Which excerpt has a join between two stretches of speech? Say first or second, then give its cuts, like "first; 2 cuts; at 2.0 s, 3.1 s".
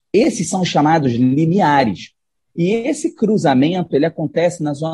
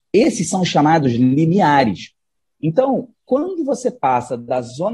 first; 1 cut; at 2.5 s